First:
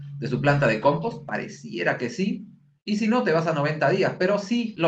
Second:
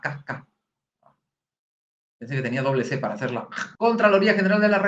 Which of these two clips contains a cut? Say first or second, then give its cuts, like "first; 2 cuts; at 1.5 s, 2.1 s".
second; 1 cut; at 3.8 s